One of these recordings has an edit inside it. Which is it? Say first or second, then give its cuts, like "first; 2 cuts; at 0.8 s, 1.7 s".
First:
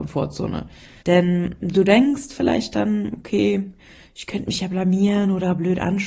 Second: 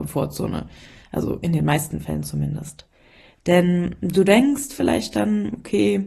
first; 1 cut; at 1.0 s